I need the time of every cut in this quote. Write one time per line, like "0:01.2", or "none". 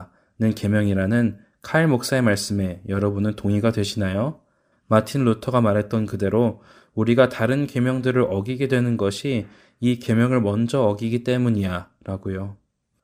0:04.7